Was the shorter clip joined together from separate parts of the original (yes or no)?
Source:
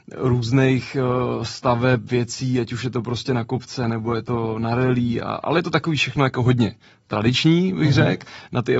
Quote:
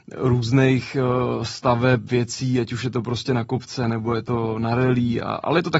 no